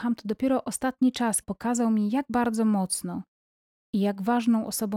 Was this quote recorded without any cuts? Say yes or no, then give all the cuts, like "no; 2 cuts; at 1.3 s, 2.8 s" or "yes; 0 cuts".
no; 1 cut; at 1.4 s